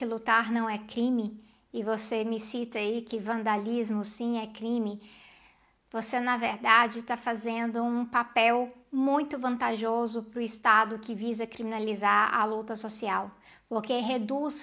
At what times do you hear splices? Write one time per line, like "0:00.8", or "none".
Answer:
none

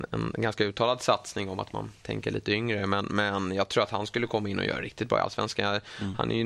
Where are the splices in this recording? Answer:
none

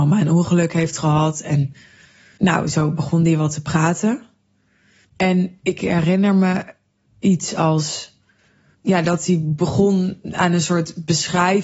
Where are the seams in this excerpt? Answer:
0:05.0

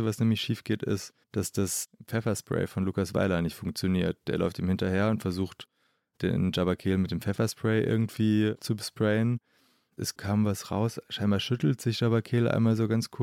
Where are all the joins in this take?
0:01.2

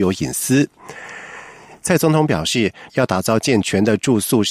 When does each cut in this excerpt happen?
0:01.8
0:02.9

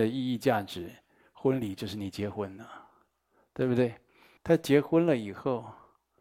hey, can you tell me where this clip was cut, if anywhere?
0:04.4

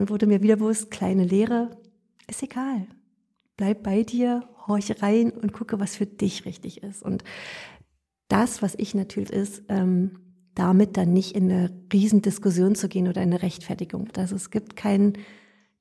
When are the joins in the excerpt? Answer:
0:09.3
0:14.1

